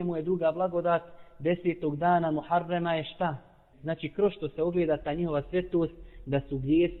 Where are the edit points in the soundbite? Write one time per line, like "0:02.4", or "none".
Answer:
0:03.7